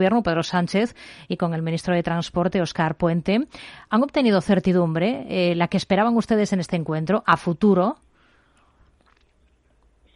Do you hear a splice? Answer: no; 0 cuts

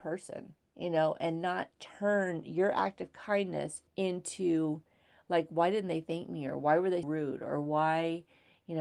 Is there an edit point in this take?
yes; 2 cuts; at 3.9 s, 7.0 s

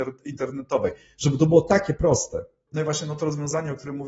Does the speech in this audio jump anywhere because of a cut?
yes; 1 cut; at 2.7 s

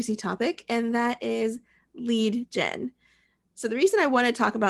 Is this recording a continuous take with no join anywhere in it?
yes; 0 cuts

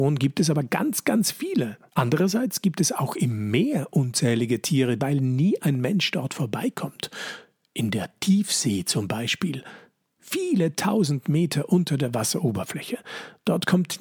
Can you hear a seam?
yes; 2 cuts; at 1.9 s, 5.0 s

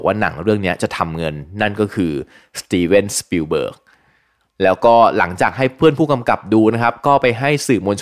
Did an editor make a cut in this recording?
no; 0 cuts

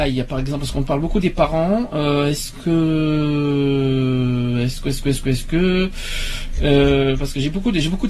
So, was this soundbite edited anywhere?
no; 0 cuts

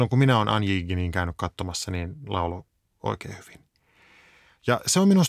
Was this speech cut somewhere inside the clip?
no; 0 cuts

